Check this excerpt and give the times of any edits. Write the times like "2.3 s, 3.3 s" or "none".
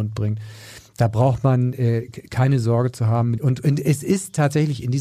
3.4 s